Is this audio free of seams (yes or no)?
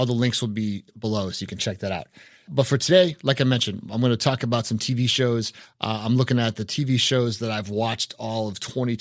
yes